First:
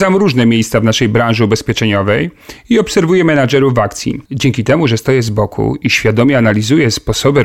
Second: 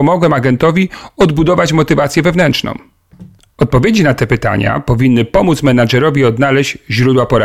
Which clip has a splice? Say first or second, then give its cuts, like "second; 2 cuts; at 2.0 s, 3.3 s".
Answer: first; 1 cut; at 4.2 s